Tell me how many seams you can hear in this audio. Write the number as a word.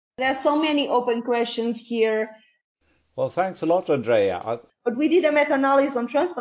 one